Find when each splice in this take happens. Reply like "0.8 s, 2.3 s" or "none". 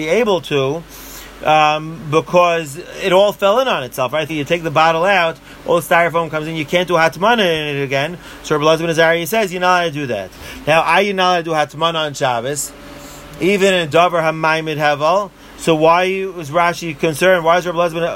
4.3 s